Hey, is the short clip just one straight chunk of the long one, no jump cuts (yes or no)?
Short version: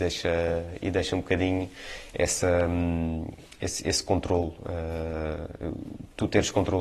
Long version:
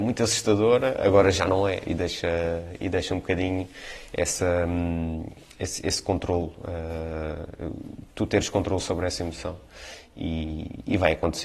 yes